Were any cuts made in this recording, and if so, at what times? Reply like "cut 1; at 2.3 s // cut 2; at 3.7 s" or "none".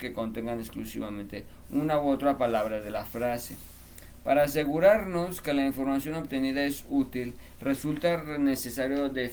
none